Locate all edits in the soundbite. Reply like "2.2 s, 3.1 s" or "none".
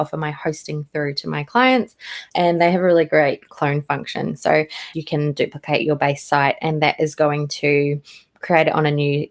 4.9 s